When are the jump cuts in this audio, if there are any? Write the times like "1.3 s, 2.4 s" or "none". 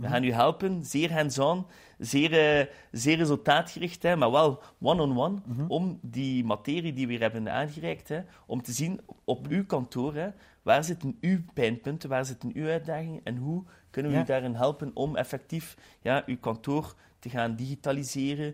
none